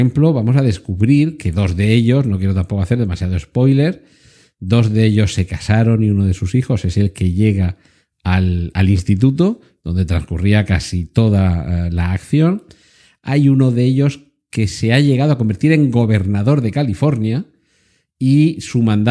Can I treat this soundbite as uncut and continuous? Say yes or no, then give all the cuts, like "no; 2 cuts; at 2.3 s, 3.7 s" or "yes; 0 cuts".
yes; 0 cuts